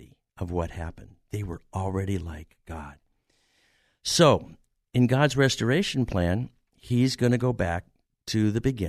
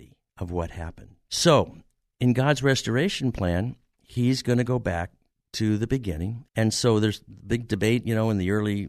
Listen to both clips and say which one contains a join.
second; 2 cuts; at 1.3 s, 6.5 s

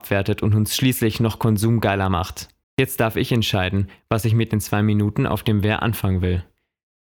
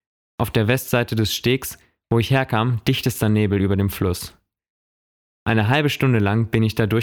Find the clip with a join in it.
first; 1 cut; at 2.6 s

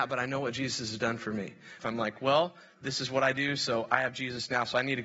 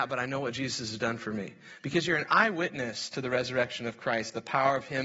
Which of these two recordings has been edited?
first; 1 cut; at 1.8 s

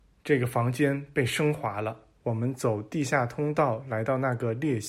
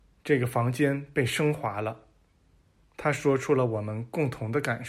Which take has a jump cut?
first; 1 cut; at 2.2 s

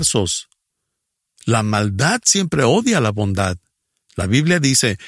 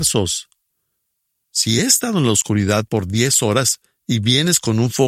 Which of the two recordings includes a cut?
first; 1 cut; at 1.4 s

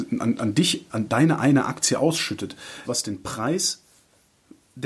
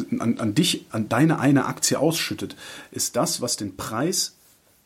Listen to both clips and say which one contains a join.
first; 1 cut; at 2.8 s

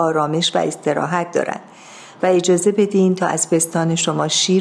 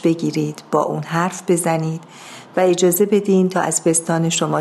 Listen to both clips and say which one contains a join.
first; 1 cut; at 2.1 s

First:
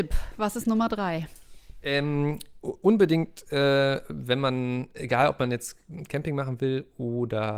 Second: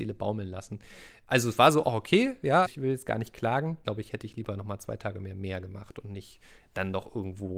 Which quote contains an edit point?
second; 2 cuts; at 2.7 s, 3.8 s

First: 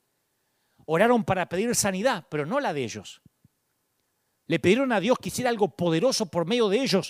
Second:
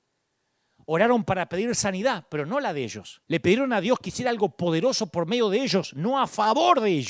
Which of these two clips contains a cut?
second; 1 cut; at 3.2 s

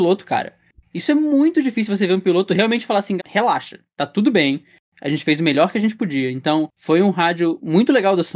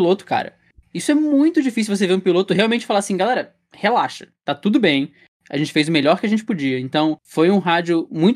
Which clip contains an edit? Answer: first; 1 cut; at 3.2 s

